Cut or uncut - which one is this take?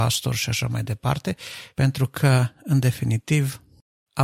cut